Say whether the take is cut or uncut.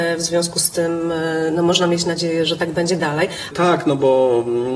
cut